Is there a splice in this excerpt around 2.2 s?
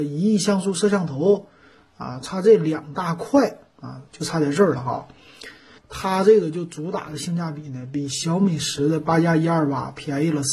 no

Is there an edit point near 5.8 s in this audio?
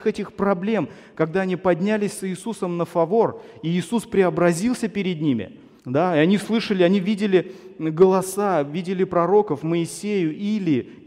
yes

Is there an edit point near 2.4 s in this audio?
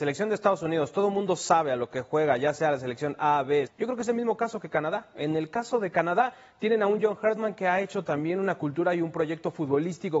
no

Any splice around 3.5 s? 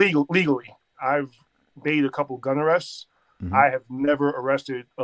no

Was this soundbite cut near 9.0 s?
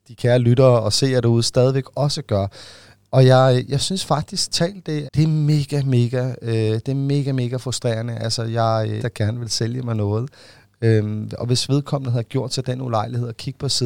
yes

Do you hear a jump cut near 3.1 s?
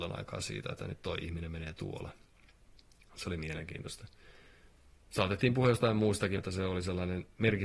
no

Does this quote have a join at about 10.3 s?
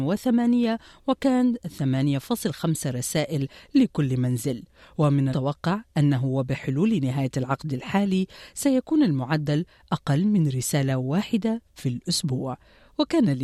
no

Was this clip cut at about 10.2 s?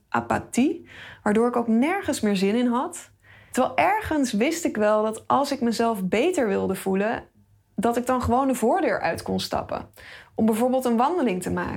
no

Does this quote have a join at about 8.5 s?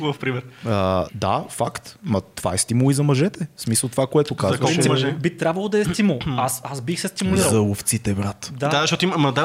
no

